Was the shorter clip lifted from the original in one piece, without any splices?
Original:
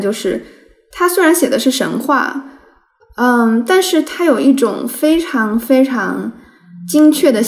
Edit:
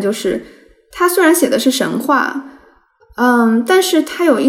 yes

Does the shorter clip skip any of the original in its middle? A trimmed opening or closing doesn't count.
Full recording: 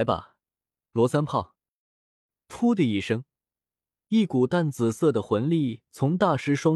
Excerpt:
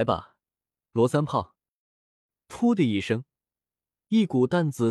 no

